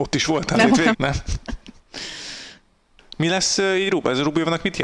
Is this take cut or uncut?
cut